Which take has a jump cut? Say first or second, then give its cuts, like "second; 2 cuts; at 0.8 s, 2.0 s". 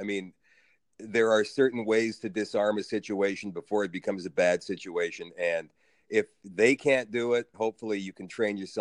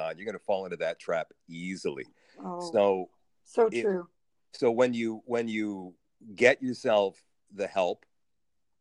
first; 1 cut; at 7.5 s